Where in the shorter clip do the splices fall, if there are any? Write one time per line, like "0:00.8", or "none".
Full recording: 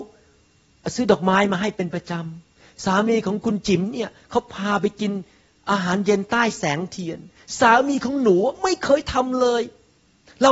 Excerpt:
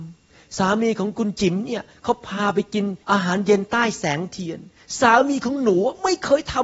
0:03.0